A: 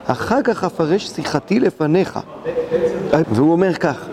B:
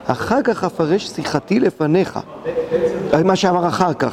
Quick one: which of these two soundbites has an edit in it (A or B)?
A